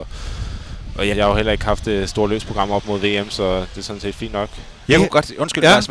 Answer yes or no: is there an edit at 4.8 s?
yes